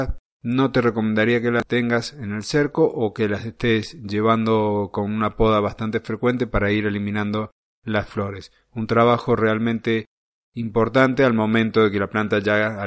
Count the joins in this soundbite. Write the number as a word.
zero